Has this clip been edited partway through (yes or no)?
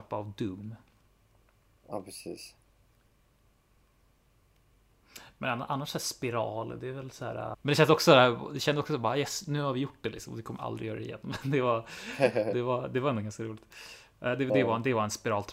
yes